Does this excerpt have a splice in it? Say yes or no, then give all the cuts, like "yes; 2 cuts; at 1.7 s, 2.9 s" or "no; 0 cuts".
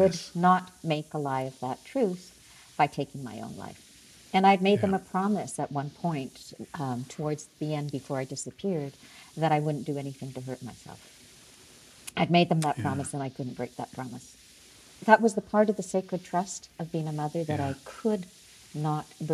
no; 0 cuts